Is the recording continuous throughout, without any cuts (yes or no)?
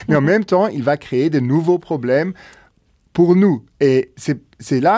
yes